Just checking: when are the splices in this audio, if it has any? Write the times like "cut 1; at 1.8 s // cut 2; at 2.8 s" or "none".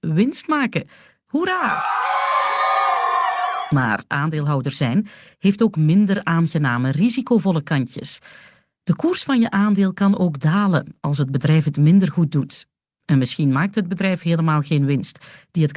none